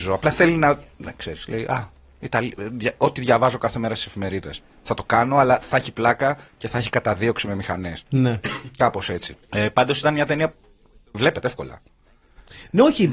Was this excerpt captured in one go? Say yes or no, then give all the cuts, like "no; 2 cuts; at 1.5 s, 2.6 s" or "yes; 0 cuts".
no; 1 cut; at 9.4 s